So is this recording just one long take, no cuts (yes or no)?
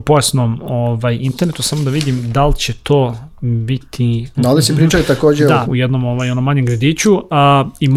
no